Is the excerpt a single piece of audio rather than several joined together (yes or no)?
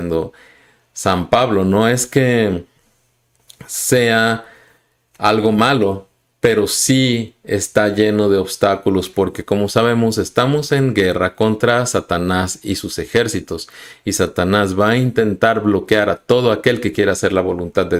yes